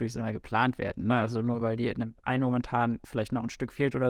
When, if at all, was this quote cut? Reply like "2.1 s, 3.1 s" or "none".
none